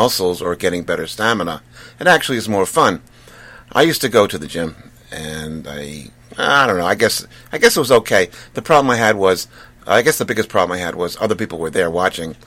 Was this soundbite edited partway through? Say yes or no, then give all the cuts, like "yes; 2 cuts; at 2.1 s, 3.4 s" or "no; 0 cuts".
no; 0 cuts